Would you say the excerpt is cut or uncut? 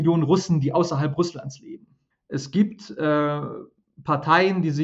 cut